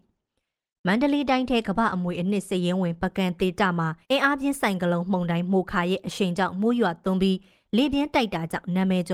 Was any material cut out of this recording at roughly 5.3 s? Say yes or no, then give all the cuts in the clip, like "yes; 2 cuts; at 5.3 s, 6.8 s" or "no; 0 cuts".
no; 2 cuts; at 1.6 s, 4.0 s